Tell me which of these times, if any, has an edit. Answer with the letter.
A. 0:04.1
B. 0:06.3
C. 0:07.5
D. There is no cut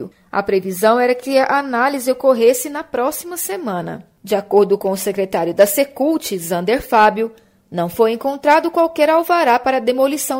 D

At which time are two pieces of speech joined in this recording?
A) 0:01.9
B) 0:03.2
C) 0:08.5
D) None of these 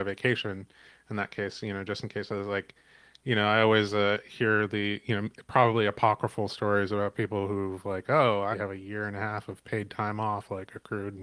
C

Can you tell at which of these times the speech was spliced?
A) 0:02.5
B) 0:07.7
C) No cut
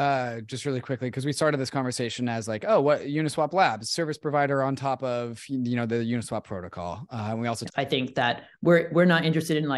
B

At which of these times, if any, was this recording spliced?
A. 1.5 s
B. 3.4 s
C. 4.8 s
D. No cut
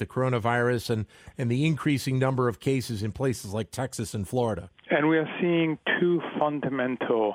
C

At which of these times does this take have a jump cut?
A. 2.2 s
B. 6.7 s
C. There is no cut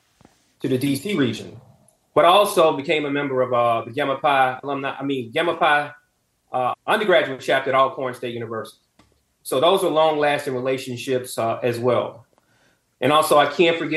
B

